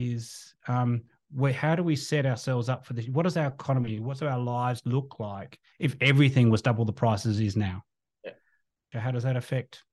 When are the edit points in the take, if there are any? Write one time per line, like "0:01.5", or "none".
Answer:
0:08.9